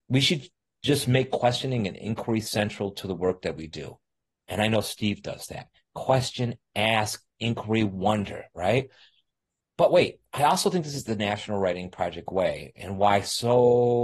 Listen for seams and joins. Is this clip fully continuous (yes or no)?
yes